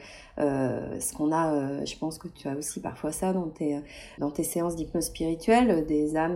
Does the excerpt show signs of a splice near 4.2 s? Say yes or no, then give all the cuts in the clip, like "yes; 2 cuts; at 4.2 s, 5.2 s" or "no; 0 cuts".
yes; 1 cut; at 4.2 s